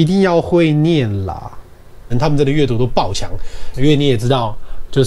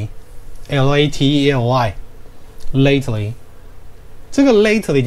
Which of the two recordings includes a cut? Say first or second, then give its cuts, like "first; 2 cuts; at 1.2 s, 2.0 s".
first; 2 cuts; at 2.1 s, 3.7 s